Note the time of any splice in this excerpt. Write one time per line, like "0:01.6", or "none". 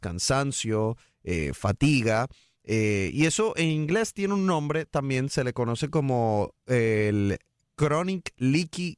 none